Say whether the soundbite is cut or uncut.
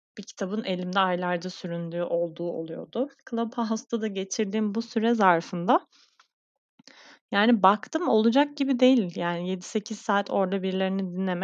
cut